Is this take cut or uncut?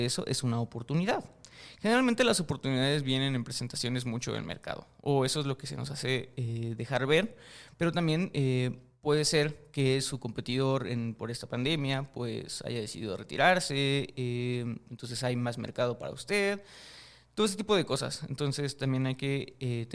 uncut